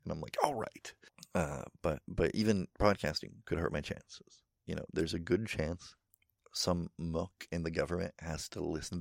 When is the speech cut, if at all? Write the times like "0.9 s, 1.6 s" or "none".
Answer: 2.7 s